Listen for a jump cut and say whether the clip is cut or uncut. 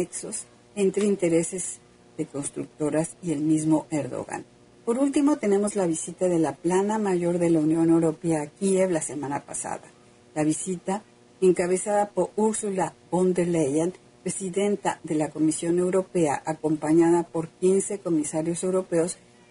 cut